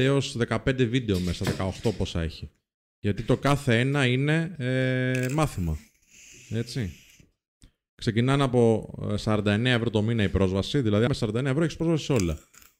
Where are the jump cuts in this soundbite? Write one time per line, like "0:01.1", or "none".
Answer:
0:11.1

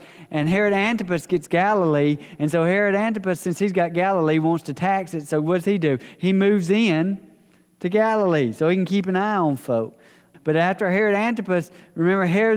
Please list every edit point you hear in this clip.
0:10.3

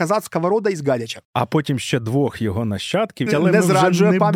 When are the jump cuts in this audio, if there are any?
0:01.2
0:03.3

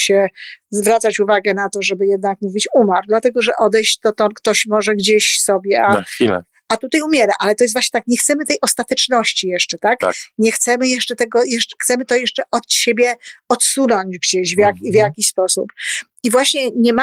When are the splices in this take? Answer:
none

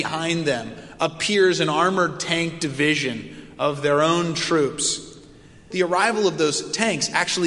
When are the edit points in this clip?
0:05.7

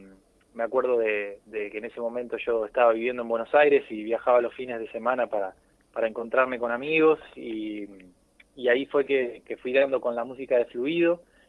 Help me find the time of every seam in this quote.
0:09.4

